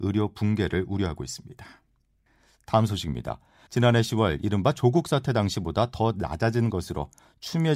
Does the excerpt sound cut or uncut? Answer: cut